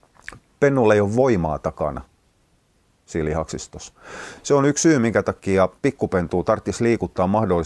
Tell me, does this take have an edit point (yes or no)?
no